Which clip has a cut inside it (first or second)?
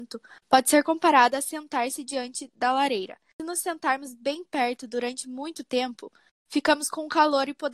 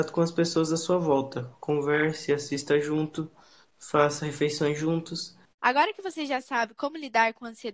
second